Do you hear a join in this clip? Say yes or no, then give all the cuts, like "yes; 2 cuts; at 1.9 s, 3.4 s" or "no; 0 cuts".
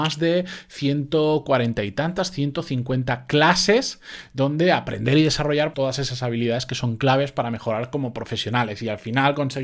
yes; 1 cut; at 5.7 s